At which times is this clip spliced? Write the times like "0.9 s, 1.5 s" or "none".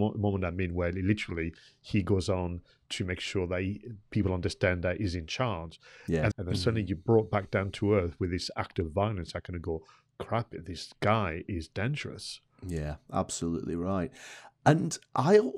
6.3 s